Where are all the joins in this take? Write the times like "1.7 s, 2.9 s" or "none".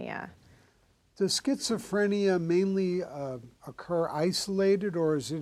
none